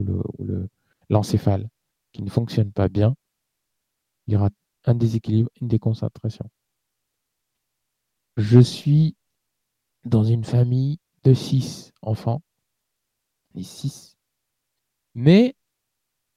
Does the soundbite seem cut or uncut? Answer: uncut